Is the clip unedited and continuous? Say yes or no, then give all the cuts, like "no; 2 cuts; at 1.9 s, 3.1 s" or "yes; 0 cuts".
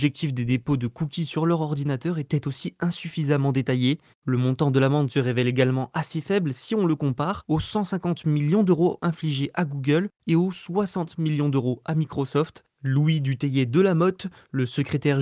no; 2 cuts; at 4.1 s, 10.2 s